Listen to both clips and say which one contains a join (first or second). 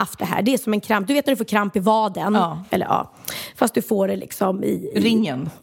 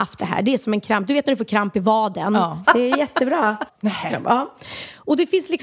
second